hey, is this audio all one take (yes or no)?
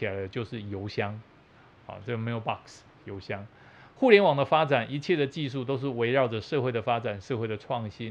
yes